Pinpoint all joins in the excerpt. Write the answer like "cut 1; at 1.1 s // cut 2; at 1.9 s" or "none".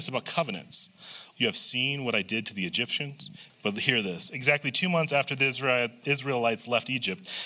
cut 1; at 1.3 s // cut 2; at 3.5 s